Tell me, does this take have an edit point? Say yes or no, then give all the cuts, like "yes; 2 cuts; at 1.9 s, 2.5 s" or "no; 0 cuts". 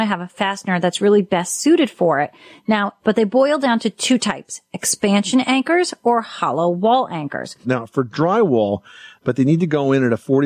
yes; 3 cuts; at 3.0 s, 7.6 s, 9.2 s